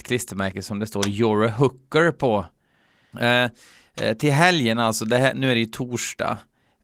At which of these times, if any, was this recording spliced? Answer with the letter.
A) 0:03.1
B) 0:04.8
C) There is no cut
A